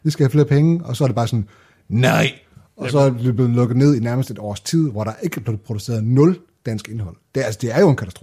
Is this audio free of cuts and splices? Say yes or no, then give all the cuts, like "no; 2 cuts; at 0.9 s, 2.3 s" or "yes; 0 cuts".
yes; 0 cuts